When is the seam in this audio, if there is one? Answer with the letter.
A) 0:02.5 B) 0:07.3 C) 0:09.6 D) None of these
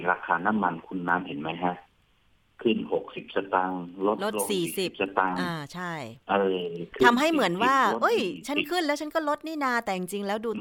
D